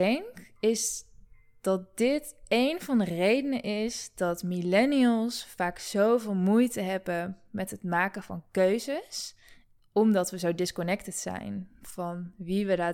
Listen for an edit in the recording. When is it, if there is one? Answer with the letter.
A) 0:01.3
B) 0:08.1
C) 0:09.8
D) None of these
C